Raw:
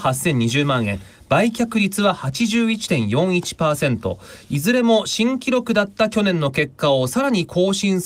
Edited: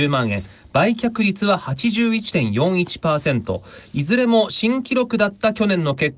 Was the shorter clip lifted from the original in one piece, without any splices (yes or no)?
yes